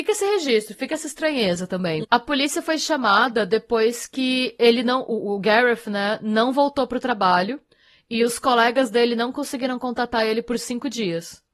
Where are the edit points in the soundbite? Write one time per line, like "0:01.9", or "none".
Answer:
0:02.0